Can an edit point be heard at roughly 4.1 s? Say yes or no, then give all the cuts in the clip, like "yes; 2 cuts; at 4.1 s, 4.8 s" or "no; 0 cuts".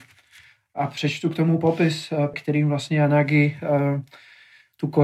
no; 1 cut; at 2.3 s